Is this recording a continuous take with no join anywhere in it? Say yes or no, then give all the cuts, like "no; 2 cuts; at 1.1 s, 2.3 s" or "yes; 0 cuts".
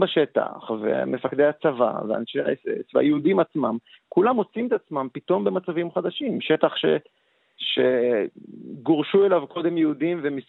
yes; 0 cuts